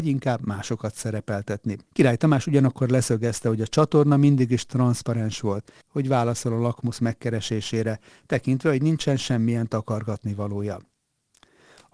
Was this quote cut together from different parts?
yes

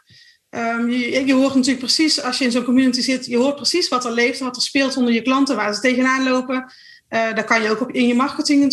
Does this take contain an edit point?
no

